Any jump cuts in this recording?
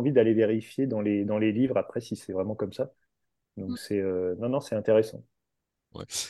no; 0 cuts

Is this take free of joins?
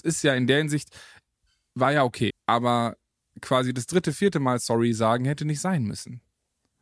no; 1 cut; at 2.3 s

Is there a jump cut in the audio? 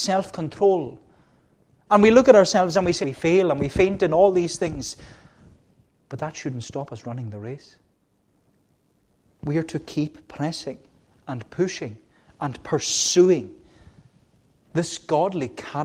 yes; 1 cut; at 3.0 s

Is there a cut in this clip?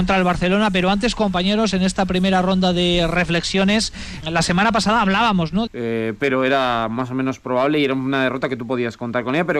yes; 2 cuts; at 4.2 s, 5.7 s

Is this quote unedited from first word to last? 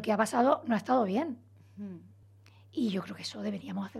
yes; 0 cuts

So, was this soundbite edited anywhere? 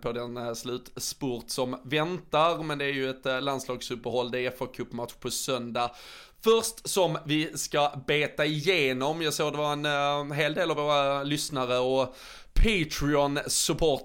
no; 0 cuts

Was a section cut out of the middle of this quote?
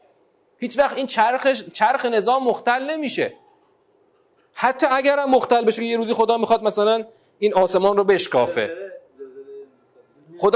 no; 0 cuts

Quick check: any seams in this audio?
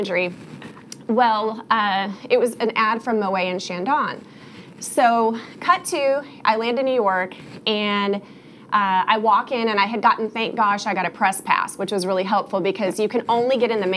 no; 0 cuts

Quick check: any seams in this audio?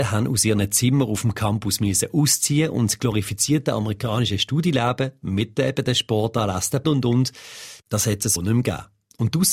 yes; 2 cuts; at 6.8 s, 8.4 s

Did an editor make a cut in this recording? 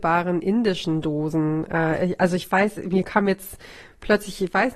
yes; 1 cut; at 3.0 s

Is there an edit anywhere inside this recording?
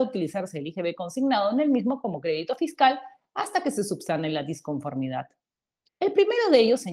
yes; 1 cut; at 5.8 s

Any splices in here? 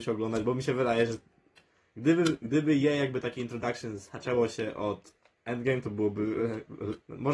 no; 0 cuts

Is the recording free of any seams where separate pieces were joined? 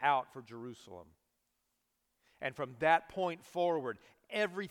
yes; 0 cuts

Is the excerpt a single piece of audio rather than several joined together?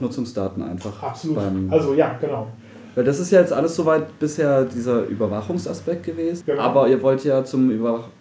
yes; 0 cuts

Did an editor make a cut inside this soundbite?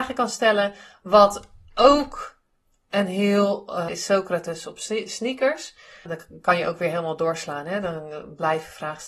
yes; 2 cuts; at 3.9 s, 6.1 s

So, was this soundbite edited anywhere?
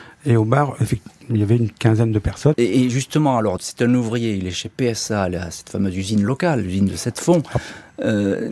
yes; 3 cuts; at 1.2 s, 2.5 s, 3.6 s

